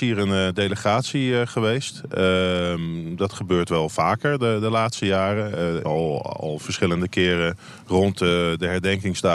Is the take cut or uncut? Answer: cut